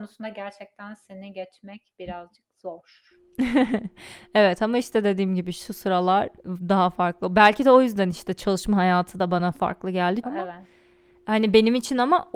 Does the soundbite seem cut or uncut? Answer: cut